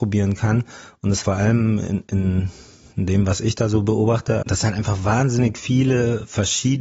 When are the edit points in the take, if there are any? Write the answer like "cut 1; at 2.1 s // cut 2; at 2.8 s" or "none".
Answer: cut 1; at 1.2 s // cut 2; at 4.4 s